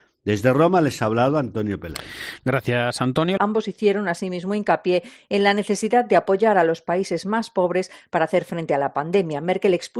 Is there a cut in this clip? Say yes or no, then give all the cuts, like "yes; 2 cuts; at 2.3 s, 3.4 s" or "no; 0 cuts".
yes; 1 cut; at 3.4 s